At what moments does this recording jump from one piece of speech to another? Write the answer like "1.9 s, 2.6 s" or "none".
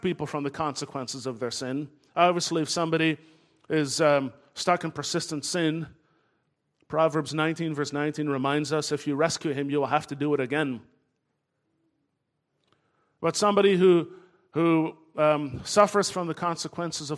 none